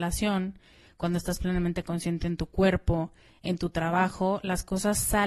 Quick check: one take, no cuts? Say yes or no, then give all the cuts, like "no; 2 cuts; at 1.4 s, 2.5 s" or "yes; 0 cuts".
yes; 0 cuts